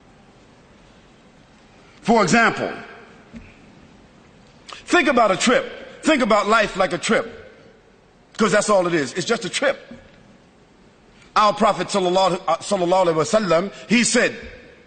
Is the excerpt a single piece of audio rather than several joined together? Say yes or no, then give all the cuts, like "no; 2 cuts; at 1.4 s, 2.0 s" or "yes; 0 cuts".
yes; 0 cuts